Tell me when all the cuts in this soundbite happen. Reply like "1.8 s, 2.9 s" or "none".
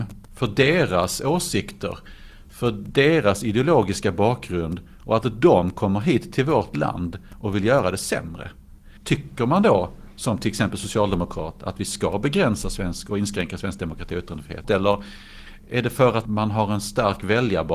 9.0 s, 14.6 s, 16.3 s